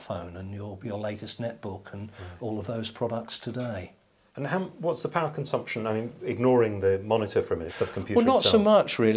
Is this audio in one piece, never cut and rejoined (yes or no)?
no